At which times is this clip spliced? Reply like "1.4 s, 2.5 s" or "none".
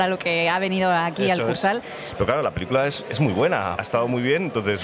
2.2 s, 3.8 s